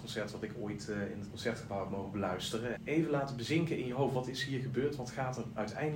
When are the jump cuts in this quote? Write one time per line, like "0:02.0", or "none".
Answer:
0:02.8